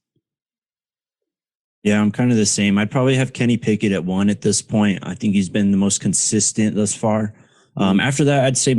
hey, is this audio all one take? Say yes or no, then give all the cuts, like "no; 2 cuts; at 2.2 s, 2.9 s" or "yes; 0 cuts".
yes; 0 cuts